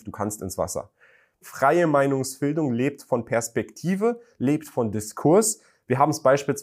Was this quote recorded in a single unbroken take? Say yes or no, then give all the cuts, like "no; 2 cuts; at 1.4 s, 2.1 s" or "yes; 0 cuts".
no; 1 cut; at 1.4 s